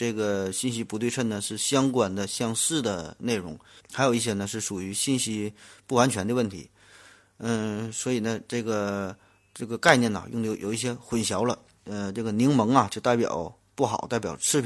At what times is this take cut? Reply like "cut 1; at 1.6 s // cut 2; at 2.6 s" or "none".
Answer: cut 1; at 3.8 s // cut 2; at 11.8 s